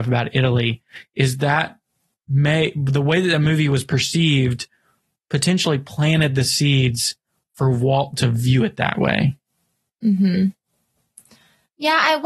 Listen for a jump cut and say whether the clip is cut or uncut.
uncut